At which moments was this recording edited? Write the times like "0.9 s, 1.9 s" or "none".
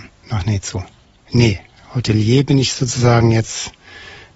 1.2 s

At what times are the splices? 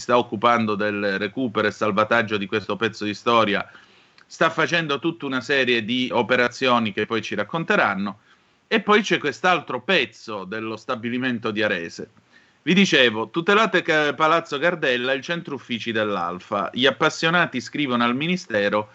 6.1 s

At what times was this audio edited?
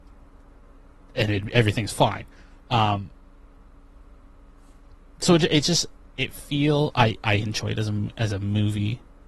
none

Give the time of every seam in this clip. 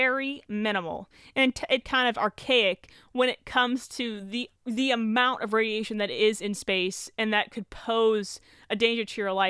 1.8 s, 4.6 s

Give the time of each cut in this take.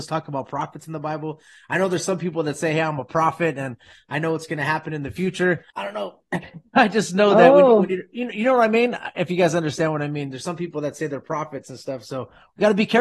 5.7 s

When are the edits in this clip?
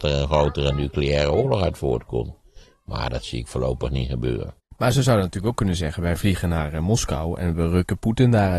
4.6 s

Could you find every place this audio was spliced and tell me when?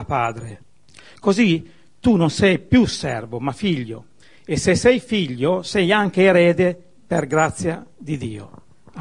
none

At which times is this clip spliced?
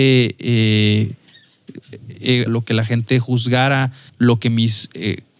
2.5 s, 4.1 s

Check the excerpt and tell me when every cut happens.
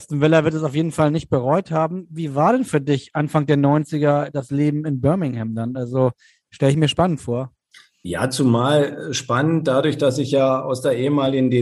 none

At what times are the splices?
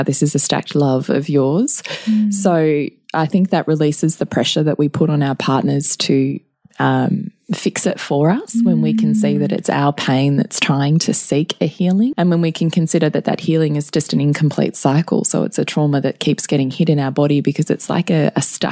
12.1 s

